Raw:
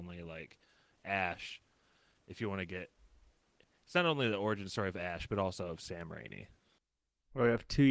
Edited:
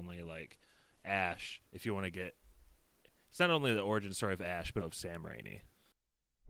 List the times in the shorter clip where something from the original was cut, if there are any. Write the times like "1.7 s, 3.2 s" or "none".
1.7 s, 4.8 s